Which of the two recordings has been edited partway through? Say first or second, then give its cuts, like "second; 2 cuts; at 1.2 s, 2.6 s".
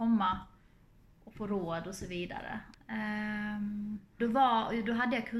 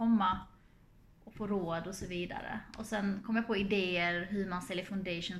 first; 2 cuts; at 2.7 s, 4.2 s